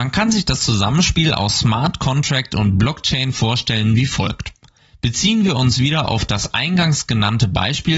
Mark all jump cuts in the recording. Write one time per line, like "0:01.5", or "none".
none